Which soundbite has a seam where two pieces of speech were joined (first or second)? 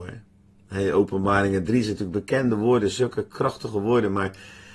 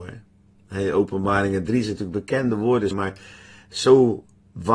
second